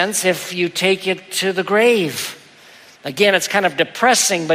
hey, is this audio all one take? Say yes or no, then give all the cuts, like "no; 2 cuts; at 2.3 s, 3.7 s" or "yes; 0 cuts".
no; 1 cut; at 3.0 s